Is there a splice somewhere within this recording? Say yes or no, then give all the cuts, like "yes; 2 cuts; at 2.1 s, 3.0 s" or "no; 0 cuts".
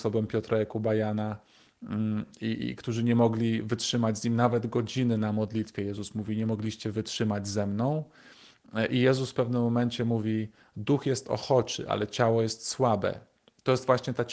no; 0 cuts